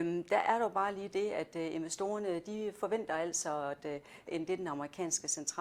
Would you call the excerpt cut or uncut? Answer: cut